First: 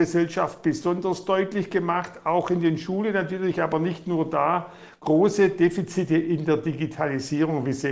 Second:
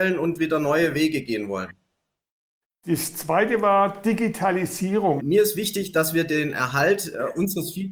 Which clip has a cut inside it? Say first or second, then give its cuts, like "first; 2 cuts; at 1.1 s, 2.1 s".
second; 1 cut; at 5.2 s